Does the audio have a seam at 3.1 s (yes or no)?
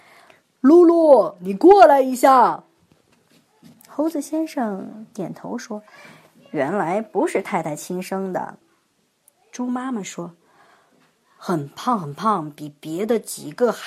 yes